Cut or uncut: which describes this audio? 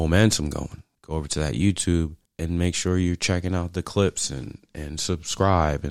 cut